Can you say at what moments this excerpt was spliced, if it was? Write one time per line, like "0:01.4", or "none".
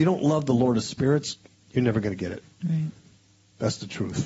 none